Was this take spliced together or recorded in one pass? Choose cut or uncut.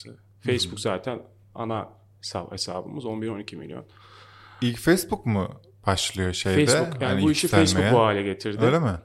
uncut